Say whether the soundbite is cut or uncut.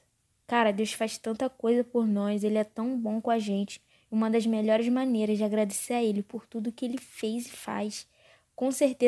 uncut